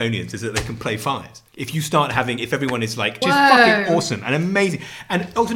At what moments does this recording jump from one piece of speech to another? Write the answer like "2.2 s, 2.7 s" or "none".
1.5 s, 3.2 s